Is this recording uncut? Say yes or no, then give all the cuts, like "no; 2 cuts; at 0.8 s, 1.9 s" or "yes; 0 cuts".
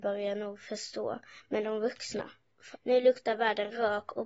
no; 1 cut; at 2.7 s